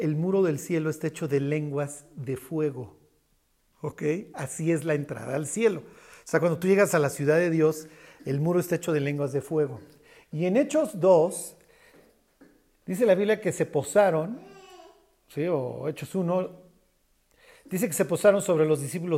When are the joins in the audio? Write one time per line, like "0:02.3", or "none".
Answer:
none